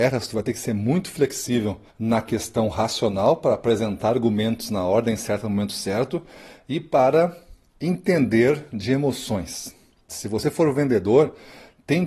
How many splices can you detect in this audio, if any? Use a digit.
2